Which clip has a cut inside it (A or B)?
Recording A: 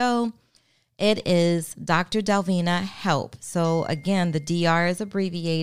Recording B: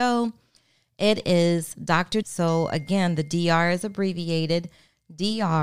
B